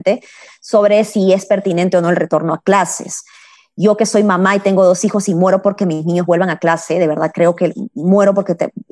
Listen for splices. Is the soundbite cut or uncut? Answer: uncut